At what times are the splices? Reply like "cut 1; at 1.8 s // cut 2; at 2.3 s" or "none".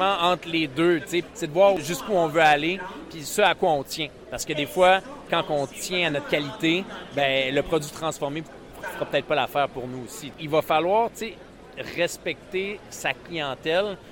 cut 1; at 10.3 s